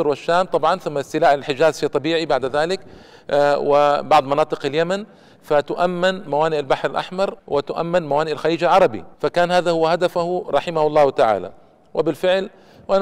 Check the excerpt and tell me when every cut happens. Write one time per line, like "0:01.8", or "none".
0:07.4
0:09.1